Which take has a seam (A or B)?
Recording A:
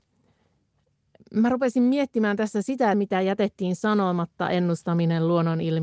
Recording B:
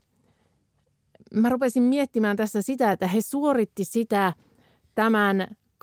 A